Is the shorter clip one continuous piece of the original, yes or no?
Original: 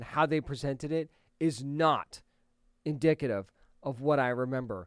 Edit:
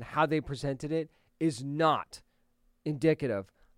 yes